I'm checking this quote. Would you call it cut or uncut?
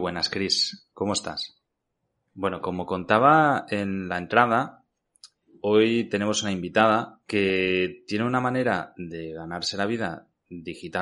cut